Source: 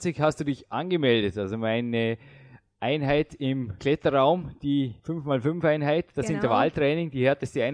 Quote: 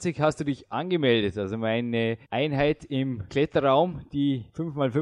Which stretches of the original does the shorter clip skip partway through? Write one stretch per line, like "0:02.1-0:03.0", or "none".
0:02.2-0:02.7